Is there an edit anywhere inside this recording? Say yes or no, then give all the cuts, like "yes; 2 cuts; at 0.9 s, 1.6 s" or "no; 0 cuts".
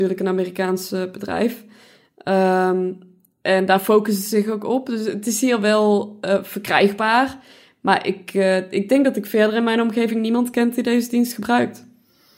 no; 0 cuts